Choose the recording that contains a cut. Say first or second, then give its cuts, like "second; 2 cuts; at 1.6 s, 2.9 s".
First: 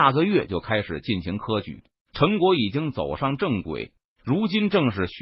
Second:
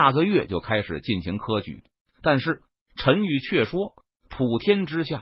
second; 1 cut; at 2.1 s